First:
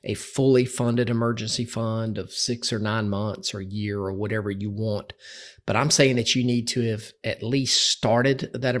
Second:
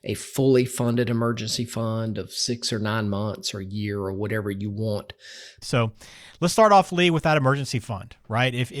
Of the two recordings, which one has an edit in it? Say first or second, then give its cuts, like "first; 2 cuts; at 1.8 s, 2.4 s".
second; 1 cut; at 5.6 s